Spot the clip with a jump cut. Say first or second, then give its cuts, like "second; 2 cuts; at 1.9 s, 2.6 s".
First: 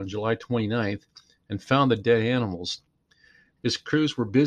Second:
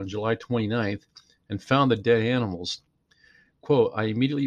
first; 1 cut; at 3.6 s